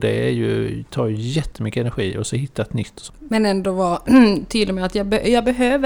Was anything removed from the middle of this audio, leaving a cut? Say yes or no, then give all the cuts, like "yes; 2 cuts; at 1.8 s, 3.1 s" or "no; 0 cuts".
yes; 1 cut; at 3.1 s